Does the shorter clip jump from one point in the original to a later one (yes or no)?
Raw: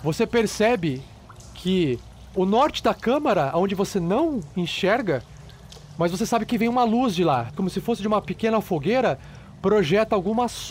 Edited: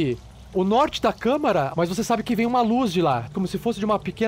yes